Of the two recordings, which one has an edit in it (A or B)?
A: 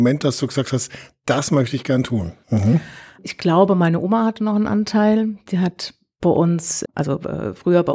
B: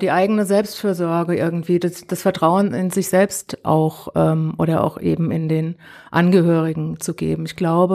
A